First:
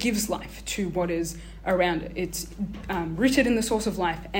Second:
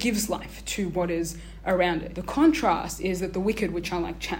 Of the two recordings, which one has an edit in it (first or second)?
second